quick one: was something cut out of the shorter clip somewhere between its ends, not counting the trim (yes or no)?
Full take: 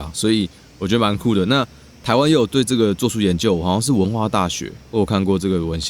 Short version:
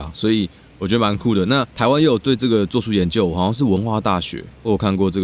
yes